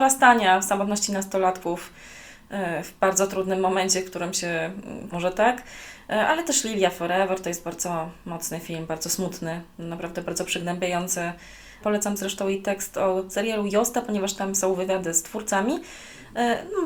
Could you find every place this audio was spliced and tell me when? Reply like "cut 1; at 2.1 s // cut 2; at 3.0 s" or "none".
cut 1; at 5.1 s // cut 2; at 11.8 s

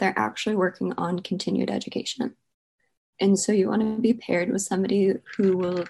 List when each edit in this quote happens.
cut 1; at 3.1 s

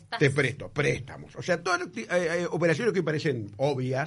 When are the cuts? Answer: none

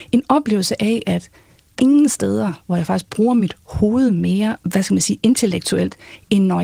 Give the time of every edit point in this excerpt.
cut 1; at 1.8 s // cut 2; at 4.6 s

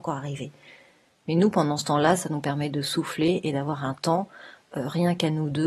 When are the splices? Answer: none

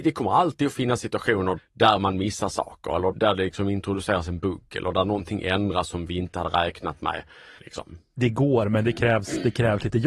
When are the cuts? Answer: cut 1; at 1.6 s // cut 2; at 3.1 s // cut 3; at 7.6 s

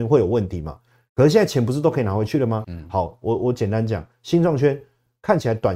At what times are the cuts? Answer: cut 1; at 2.6 s

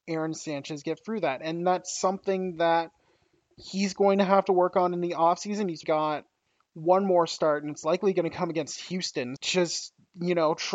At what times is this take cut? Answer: cut 1; at 5.8 s // cut 2; at 9.4 s

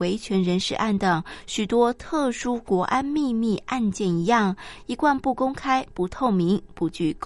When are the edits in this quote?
none

